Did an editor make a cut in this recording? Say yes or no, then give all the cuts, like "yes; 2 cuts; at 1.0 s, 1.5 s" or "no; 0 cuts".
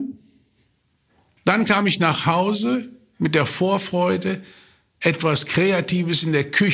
no; 0 cuts